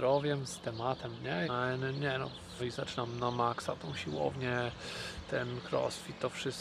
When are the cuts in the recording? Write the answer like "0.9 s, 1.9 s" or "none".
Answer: 1.4 s, 2.6 s